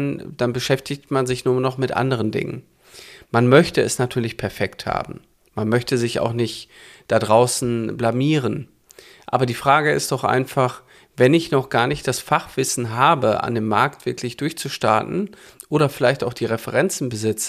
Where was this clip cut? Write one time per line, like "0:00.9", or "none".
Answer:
none